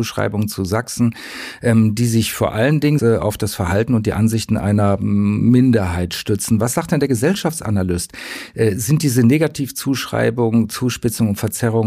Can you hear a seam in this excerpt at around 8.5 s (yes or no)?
no